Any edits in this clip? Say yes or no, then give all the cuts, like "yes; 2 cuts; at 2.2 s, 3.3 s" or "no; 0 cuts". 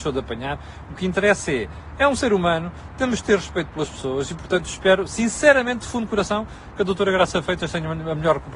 no; 0 cuts